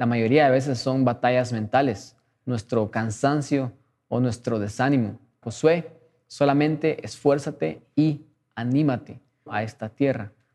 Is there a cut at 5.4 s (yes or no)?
yes